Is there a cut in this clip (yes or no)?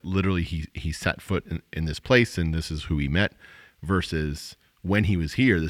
no